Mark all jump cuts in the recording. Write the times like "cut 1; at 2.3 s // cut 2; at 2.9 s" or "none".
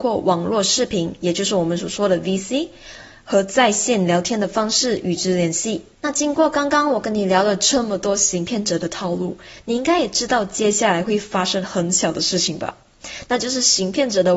cut 1; at 5.9 s